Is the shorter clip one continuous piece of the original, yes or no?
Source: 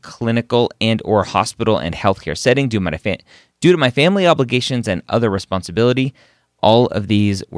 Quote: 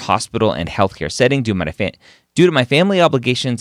yes